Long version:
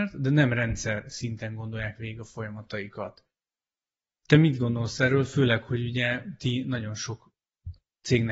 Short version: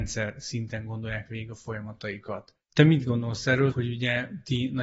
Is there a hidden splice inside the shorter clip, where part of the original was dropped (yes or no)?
yes